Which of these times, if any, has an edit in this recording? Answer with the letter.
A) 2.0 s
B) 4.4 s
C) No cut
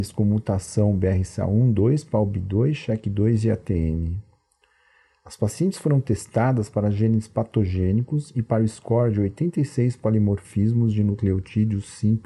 C